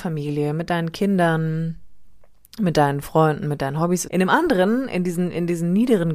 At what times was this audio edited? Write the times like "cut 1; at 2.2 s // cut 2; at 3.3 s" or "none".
cut 1; at 4.0 s